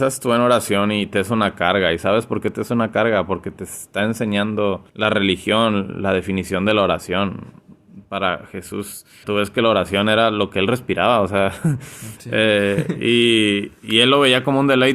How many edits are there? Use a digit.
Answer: 2